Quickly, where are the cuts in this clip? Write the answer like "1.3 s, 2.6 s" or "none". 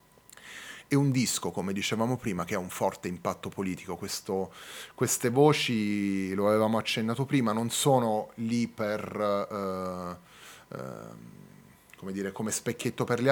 none